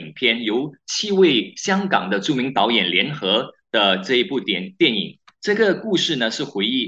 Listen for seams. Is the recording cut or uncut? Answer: cut